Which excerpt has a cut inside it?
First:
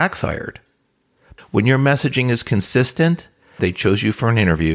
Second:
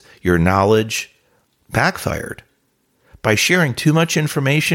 first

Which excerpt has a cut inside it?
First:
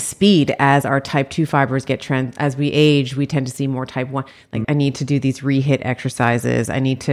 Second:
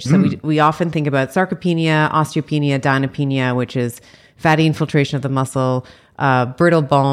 first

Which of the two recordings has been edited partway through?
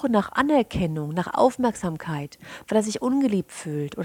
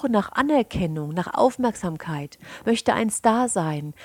first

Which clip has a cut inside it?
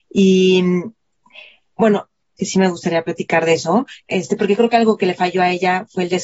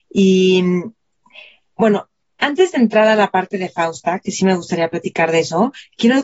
first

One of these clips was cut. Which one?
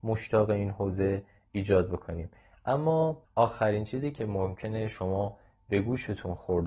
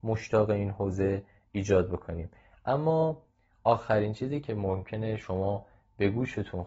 first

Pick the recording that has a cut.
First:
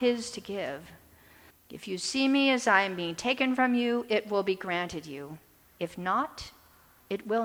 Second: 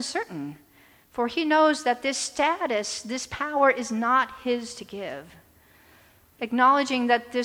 first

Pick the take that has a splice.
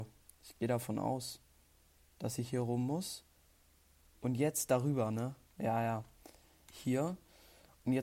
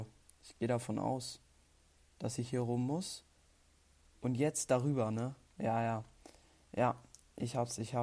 first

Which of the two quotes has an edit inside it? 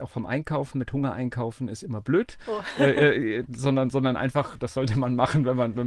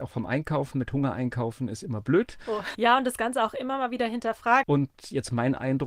second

